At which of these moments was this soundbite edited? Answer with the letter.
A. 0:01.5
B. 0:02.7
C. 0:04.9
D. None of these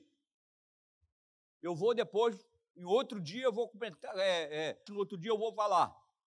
C